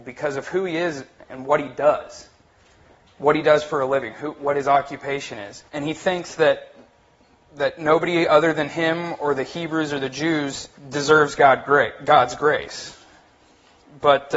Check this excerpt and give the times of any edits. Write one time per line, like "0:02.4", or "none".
0:05.7
0:10.8

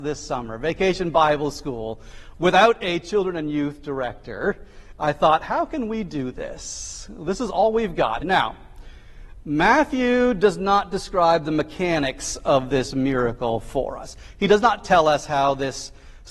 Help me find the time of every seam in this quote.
0:08.2

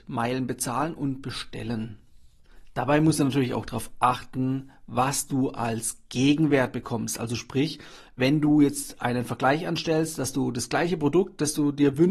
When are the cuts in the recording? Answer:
none

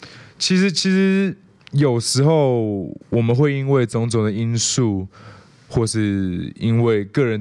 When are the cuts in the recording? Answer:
0:03.0

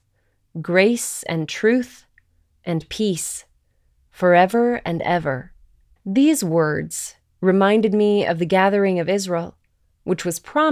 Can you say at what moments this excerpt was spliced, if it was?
0:06.0

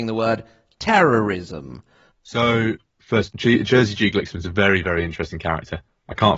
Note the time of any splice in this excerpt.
0:02.1

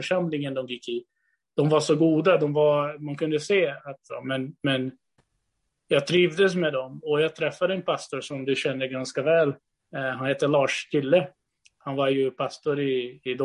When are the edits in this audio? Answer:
0:04.1

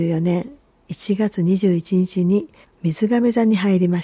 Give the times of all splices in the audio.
0:02.6

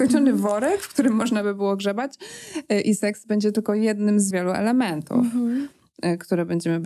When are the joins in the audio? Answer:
0:04.3

